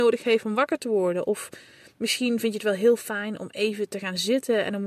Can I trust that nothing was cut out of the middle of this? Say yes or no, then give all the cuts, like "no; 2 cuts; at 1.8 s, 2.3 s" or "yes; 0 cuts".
yes; 0 cuts